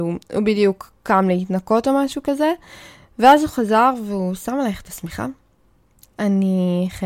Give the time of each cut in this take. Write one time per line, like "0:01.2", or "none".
0:06.1